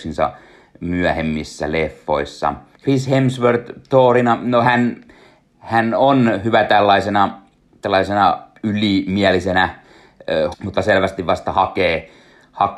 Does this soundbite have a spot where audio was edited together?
yes; 2 cuts; at 2.7 s, 10.5 s

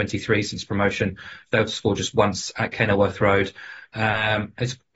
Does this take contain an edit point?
no; 0 cuts

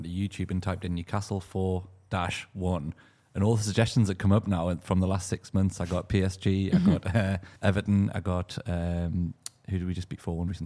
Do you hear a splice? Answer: yes; 1 cut; at 7.6 s

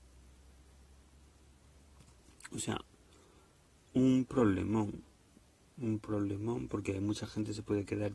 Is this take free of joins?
yes; 0 cuts

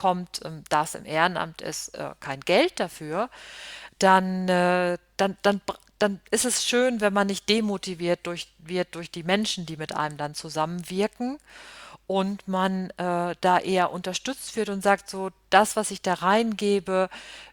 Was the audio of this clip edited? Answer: no; 0 cuts

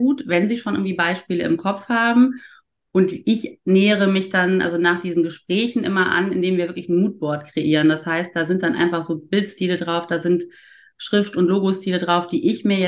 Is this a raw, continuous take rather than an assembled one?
yes; 0 cuts

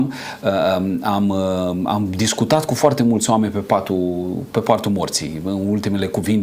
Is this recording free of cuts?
yes; 0 cuts

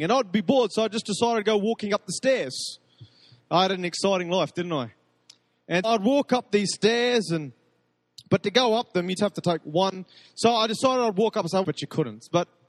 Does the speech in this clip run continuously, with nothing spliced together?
no; 3 cuts; at 5.8 s, 9.2 s, 11.6 s

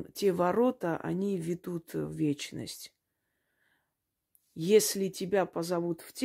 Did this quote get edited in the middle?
no; 0 cuts

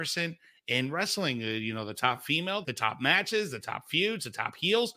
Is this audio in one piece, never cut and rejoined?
no; 1 cut; at 2.6 s

